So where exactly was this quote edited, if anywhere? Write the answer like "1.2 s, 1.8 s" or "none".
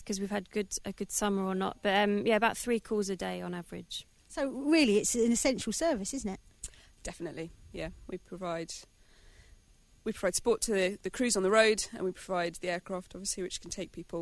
none